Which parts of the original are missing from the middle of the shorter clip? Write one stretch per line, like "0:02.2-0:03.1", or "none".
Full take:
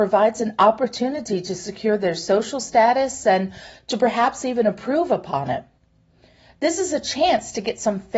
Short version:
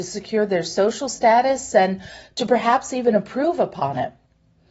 none